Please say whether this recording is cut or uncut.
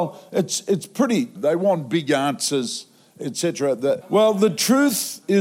cut